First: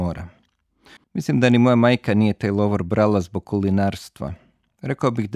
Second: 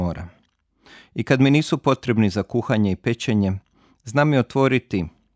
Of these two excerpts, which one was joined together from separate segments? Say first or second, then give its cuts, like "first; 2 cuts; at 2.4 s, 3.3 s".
first; 1 cut; at 1.0 s